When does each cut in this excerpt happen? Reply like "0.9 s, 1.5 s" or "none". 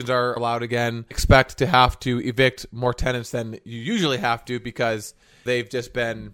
1.1 s